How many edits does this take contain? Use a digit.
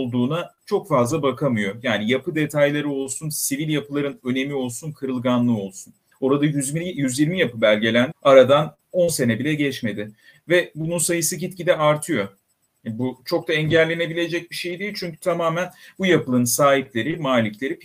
2